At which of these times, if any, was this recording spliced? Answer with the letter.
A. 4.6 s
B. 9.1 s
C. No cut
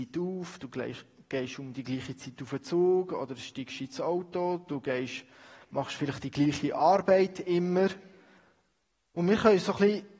B